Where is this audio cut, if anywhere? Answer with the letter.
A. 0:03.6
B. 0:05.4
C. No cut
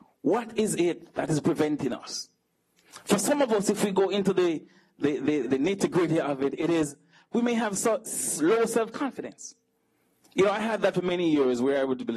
B